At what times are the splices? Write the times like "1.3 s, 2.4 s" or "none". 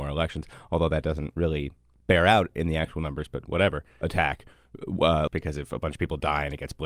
4.0 s, 5.3 s